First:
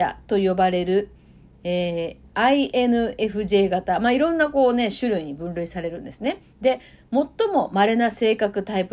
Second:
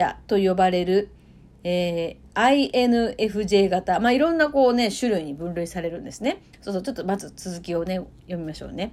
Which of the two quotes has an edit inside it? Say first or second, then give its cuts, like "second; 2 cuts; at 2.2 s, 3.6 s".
second; 1 cut; at 6.5 s